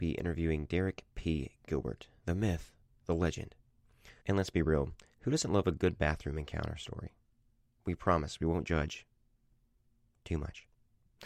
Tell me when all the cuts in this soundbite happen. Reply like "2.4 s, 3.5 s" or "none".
2.2 s, 4.2 s